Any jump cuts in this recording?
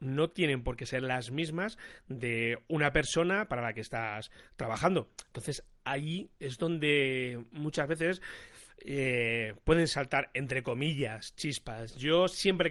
no; 0 cuts

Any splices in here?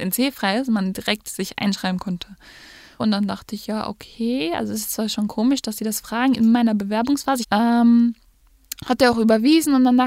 yes; 2 cuts; at 3.0 s, 7.4 s

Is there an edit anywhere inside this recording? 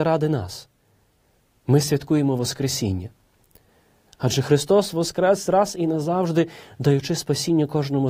yes; 1 cut; at 4.1 s

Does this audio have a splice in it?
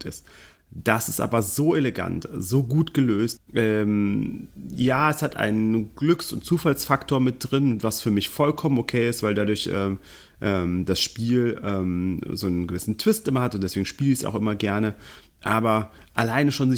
yes; 1 cut; at 3.4 s

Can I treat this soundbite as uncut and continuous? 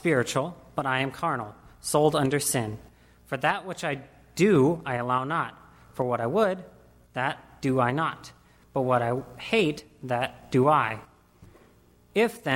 yes; 0 cuts

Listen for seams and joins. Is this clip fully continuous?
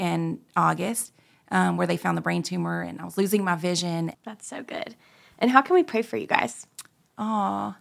no; 1 cut; at 4.1 s

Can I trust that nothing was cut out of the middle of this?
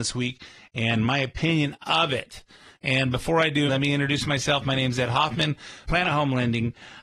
no; 2 cuts; at 3.7 s, 5.8 s

